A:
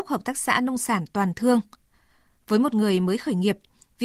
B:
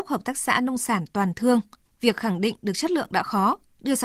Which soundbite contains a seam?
B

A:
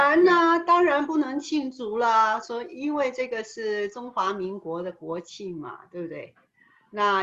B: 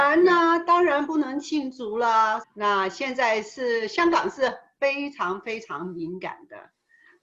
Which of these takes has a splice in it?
B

